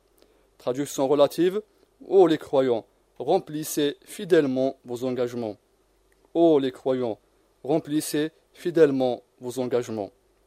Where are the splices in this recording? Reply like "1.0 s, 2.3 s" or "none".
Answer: none